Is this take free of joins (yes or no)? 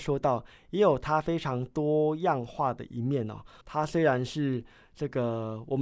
no